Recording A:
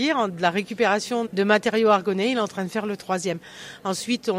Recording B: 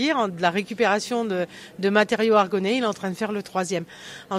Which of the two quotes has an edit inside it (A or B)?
A